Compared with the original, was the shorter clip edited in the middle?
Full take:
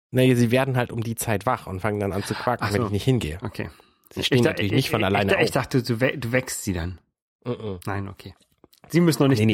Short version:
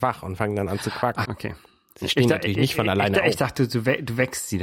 yes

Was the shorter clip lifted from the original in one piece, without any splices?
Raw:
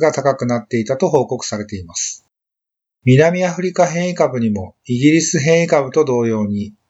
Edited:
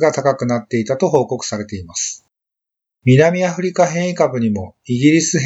yes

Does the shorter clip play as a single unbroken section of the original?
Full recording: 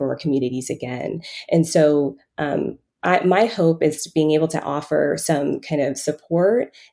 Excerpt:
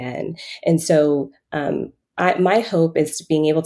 yes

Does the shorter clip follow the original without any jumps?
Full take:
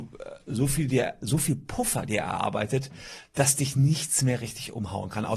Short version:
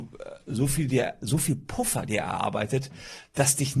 yes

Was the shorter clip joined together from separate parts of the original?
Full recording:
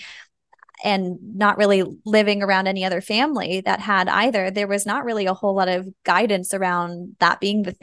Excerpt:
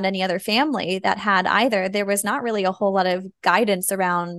no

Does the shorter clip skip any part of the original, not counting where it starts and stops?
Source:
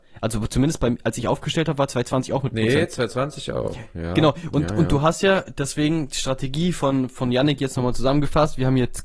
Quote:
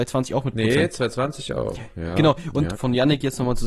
yes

